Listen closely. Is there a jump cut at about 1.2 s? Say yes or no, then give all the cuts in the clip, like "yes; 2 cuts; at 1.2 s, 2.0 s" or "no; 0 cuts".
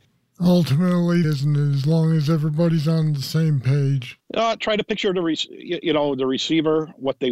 yes; 2 cuts; at 1.2 s, 4.2 s